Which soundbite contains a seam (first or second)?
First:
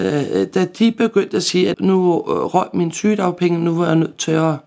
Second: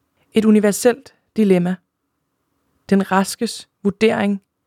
first